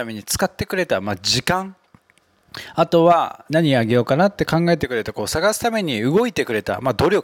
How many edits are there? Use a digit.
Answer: 1